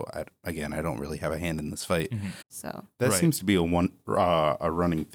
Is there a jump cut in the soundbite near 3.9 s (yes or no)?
no